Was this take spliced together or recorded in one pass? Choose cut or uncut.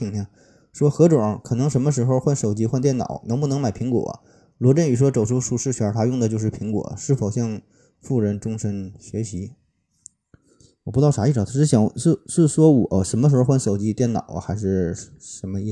uncut